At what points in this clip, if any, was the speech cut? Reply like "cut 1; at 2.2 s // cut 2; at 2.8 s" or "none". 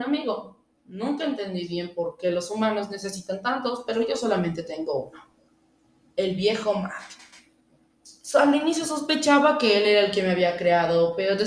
none

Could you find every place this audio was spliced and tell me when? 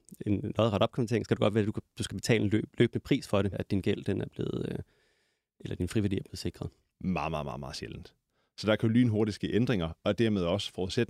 cut 1; at 3.5 s // cut 2; at 6.9 s

